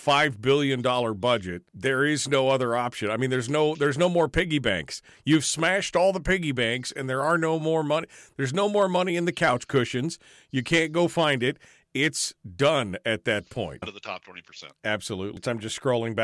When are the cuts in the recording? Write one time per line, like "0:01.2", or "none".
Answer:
0:01.7
0:13.8